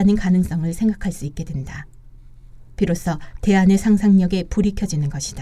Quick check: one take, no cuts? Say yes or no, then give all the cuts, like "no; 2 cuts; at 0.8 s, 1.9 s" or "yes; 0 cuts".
yes; 0 cuts